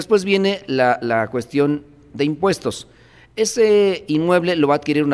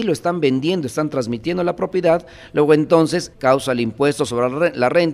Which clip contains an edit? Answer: second; 1 cut; at 3.3 s

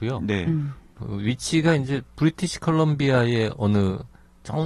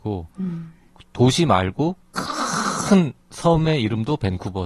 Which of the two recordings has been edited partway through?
first; 1 cut; at 1.0 s

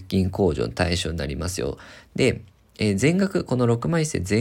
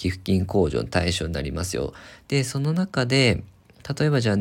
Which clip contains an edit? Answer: second; 1 cut; at 2.2 s

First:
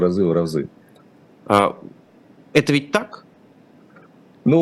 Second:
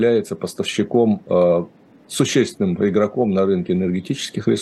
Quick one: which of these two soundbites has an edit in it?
first; 1 cut; at 1.4 s

